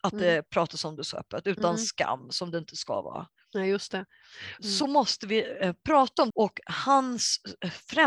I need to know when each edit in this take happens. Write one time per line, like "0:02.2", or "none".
0:04.6
0:06.3